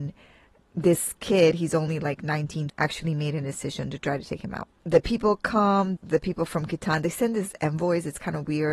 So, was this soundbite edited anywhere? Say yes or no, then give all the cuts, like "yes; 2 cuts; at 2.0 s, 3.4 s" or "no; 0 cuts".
yes; 2 cuts; at 2.7 s, 6.0 s